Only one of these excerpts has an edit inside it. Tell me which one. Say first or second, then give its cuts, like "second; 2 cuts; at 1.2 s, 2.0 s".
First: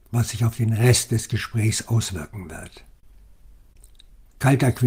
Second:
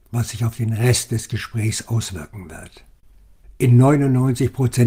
second; 1 cut; at 3.4 s